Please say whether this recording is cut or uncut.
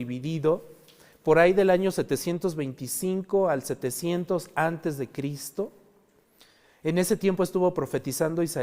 uncut